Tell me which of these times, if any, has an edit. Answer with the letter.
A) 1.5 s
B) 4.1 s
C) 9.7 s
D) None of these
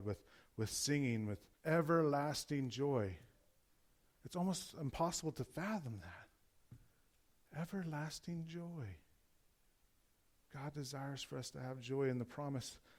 A